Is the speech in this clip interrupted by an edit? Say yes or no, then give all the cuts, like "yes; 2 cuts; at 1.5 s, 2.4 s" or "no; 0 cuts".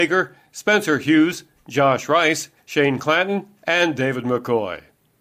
no; 0 cuts